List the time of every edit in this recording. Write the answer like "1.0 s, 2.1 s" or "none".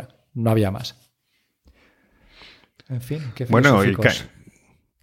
none